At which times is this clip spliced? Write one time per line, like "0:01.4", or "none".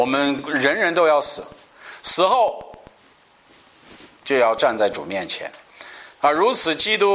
none